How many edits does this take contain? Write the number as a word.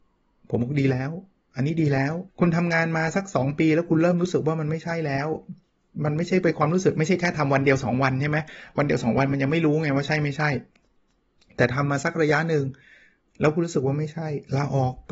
one